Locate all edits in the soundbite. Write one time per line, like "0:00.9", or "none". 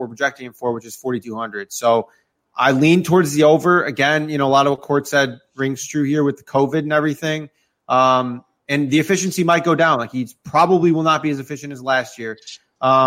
none